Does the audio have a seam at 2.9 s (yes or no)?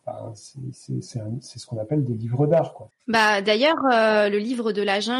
yes